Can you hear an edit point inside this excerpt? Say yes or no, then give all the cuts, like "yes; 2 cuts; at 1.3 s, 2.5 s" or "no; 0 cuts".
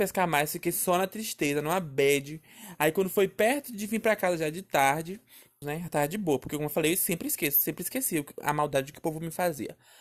yes; 1 cut; at 5.6 s